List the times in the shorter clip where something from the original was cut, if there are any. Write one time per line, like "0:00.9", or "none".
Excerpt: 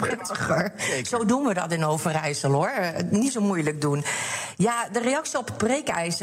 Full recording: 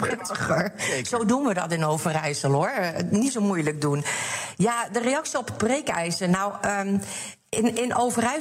none